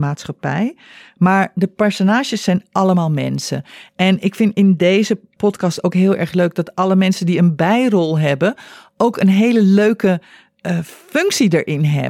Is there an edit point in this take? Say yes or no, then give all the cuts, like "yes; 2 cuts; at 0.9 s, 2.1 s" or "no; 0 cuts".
no; 0 cuts